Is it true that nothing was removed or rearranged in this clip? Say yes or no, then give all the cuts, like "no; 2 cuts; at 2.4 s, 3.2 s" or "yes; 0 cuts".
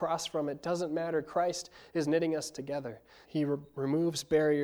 no; 1 cut; at 3.2 s